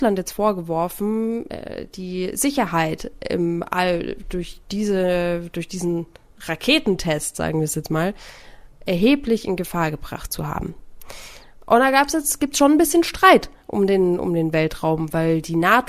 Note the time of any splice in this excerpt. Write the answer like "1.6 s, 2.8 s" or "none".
none